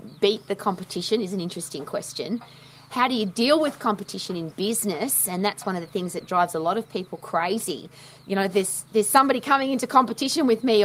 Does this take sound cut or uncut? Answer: uncut